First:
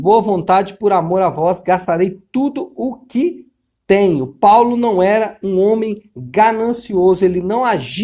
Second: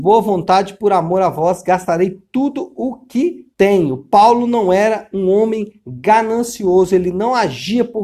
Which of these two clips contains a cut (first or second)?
second